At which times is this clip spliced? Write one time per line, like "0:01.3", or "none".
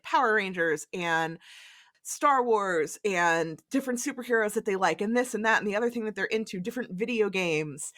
none